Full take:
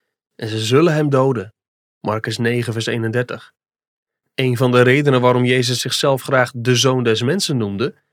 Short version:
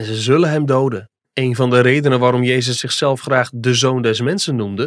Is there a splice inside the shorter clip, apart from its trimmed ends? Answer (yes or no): yes